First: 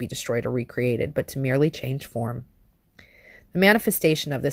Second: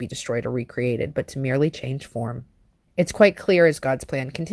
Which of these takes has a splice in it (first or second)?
second